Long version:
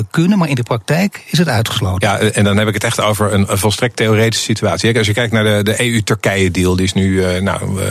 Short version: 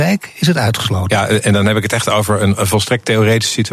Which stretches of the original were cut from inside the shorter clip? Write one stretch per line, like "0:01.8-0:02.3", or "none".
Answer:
none